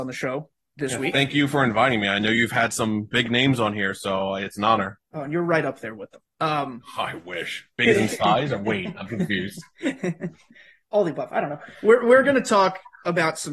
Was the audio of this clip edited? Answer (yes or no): no